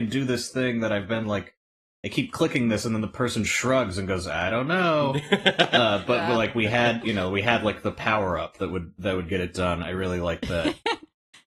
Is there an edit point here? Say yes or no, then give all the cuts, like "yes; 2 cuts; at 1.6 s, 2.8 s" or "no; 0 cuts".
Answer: no; 0 cuts